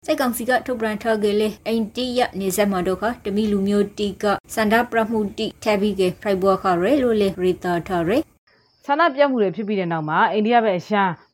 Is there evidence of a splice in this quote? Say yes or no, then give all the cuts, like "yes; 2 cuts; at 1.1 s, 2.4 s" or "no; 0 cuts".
no; 0 cuts